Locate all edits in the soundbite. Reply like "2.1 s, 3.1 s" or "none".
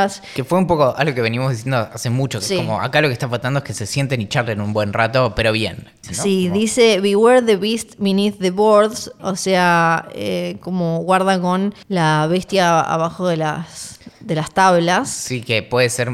6.0 s, 9.2 s, 11.8 s

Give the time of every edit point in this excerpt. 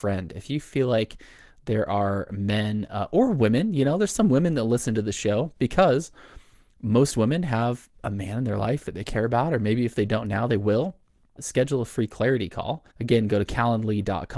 11.4 s, 12.9 s

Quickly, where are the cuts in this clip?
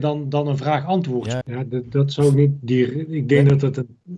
1.4 s

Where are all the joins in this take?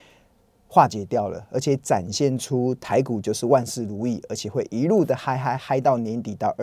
5.6 s

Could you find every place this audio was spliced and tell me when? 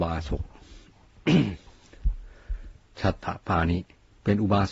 none

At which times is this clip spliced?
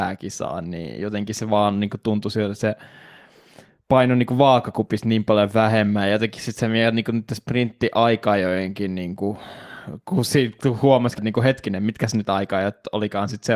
11.2 s

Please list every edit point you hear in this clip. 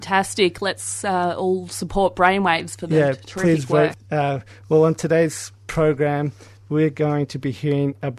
3.9 s

